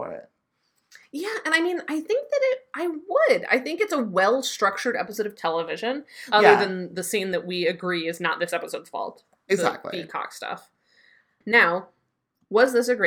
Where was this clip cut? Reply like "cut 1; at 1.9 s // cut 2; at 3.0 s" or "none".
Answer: cut 1; at 6.3 s // cut 2; at 11.4 s